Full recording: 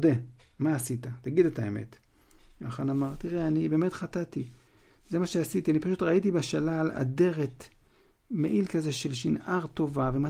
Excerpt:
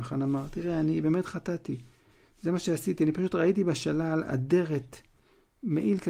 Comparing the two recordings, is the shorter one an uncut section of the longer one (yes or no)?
yes